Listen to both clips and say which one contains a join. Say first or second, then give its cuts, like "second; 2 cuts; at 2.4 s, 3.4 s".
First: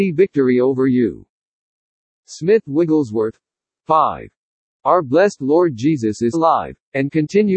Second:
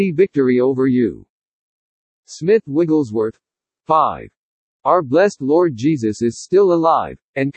first; 1 cut; at 6.3 s